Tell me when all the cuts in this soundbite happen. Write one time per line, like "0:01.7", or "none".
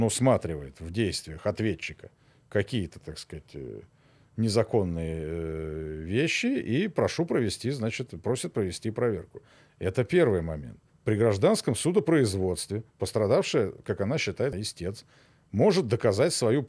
0:10.9
0:14.5